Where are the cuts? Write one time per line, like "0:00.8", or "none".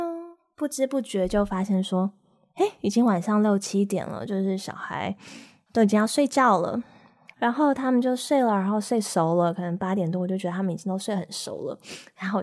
0:07.3